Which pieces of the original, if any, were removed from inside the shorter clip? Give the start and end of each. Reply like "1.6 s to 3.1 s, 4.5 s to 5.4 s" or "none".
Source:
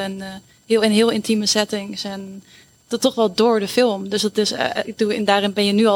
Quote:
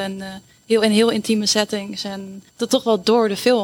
2.5 s to 2.8 s

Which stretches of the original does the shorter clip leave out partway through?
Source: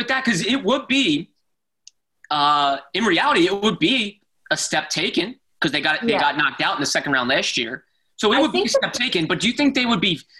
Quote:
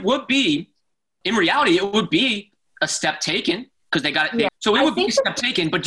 1.8 s to 2.9 s, 6.2 s to 8.1 s

